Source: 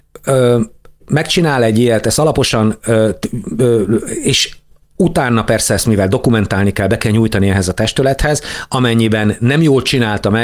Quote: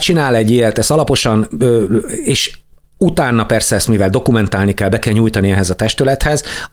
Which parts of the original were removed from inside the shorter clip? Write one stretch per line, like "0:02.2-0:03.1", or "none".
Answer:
0:02.8-0:03.5